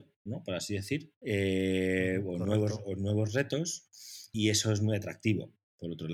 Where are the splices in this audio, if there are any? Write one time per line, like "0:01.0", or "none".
0:01.2
0:04.3